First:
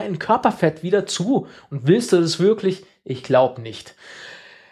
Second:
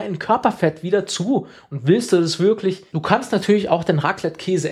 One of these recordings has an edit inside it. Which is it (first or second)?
second